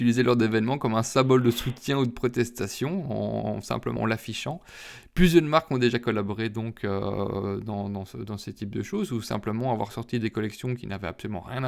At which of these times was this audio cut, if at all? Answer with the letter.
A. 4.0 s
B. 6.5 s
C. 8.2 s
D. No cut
A